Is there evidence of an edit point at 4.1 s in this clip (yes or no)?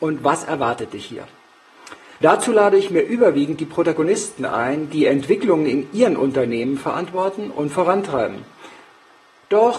no